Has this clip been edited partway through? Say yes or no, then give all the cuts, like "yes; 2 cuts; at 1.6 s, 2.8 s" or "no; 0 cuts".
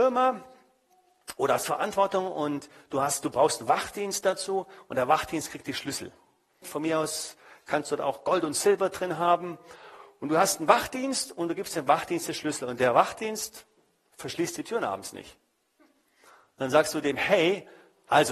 yes; 1 cut; at 6.6 s